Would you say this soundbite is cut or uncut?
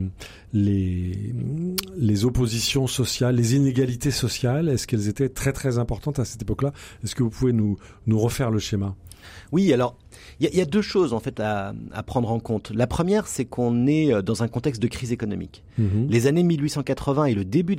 uncut